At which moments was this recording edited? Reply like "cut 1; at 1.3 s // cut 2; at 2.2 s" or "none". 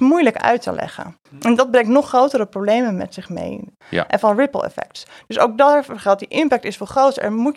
cut 1; at 1.3 s // cut 2; at 3.8 s